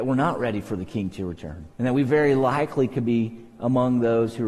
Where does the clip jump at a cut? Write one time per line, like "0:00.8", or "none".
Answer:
0:01.7